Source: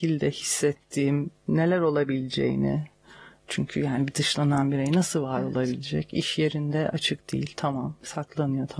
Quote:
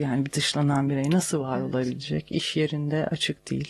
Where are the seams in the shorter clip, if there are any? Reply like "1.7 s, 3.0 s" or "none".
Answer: none